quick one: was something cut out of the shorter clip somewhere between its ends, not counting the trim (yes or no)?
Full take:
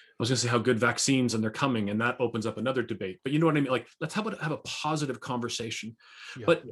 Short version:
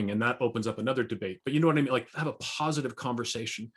yes